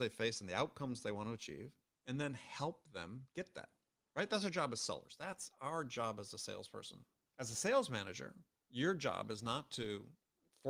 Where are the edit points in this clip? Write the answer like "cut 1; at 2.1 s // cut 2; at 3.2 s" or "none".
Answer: none